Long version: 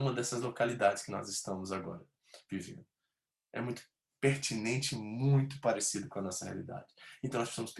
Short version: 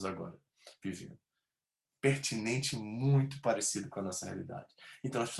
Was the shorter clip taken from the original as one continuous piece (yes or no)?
no